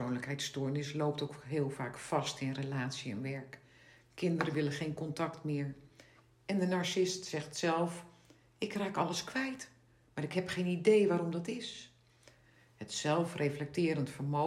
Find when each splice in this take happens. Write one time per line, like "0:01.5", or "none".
none